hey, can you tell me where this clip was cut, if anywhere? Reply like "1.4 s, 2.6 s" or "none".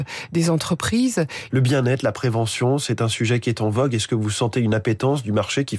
1.5 s